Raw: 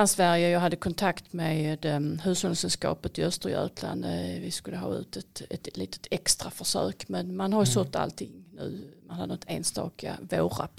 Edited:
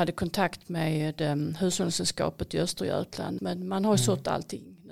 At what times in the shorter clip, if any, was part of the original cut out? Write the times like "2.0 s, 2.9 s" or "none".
3.4 s